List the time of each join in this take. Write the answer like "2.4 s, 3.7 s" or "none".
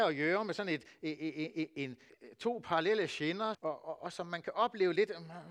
2.1 s, 3.5 s